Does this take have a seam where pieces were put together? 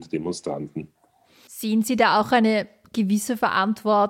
no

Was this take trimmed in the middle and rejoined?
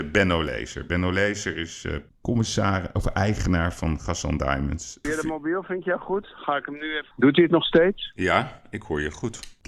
yes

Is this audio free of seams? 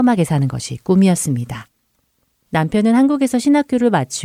yes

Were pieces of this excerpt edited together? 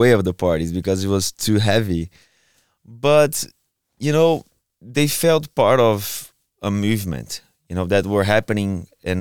no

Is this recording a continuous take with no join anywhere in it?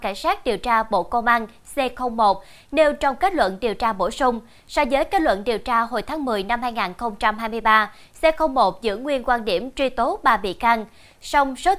yes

